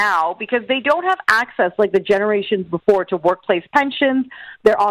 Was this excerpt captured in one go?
yes; 0 cuts

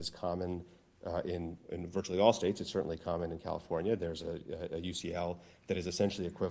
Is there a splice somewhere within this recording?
no; 0 cuts

